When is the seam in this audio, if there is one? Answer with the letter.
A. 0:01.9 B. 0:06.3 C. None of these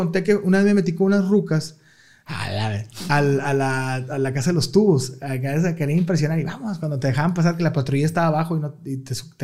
C